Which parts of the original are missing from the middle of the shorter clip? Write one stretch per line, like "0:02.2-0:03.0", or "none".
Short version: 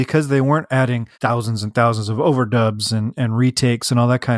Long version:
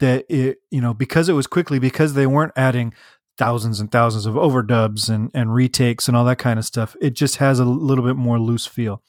0:03.0-0:03.3